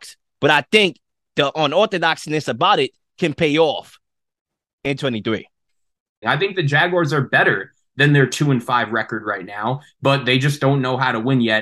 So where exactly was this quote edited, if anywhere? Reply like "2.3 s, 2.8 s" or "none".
6.2 s